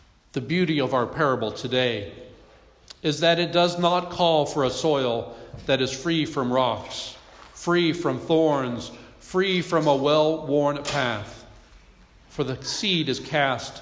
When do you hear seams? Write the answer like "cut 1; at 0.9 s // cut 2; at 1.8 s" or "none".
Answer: none